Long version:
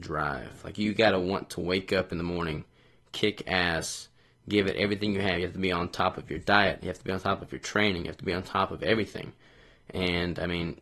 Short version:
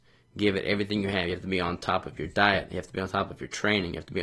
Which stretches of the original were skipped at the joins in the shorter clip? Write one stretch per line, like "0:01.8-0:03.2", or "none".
none